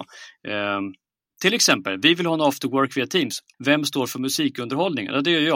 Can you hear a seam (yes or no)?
yes